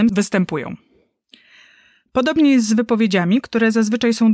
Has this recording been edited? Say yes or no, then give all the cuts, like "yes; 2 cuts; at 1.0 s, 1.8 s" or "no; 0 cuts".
no; 0 cuts